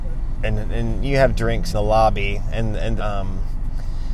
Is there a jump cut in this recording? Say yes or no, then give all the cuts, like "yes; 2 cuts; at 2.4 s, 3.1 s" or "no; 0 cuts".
yes; 2 cuts; at 1.7 s, 3.0 s